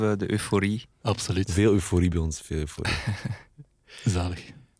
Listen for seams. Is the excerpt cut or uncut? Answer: cut